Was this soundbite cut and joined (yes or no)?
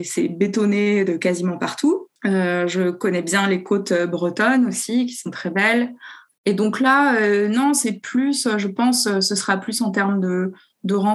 no